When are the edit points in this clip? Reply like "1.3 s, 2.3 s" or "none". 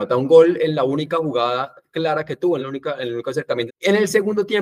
2.6 s, 3.7 s